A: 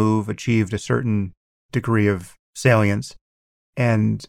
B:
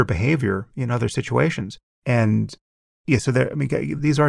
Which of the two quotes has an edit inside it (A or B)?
B